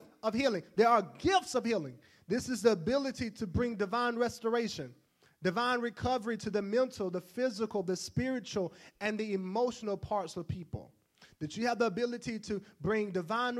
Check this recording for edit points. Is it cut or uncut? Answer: uncut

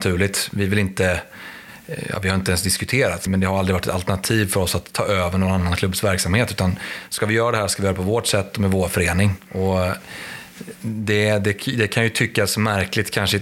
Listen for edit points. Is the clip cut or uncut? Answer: cut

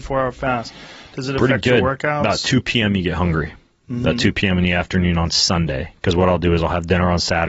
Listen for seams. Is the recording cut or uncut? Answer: uncut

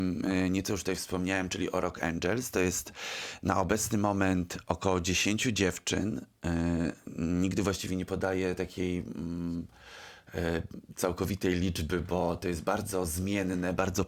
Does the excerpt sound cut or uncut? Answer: uncut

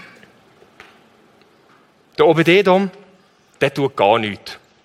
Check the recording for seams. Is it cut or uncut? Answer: uncut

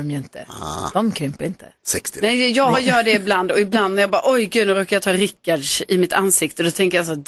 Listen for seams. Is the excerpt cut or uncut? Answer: cut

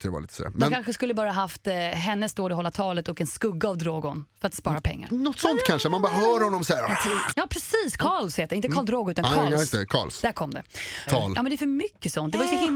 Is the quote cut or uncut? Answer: cut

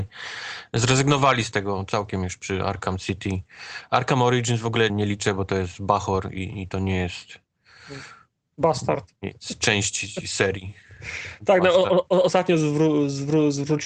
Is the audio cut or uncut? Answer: cut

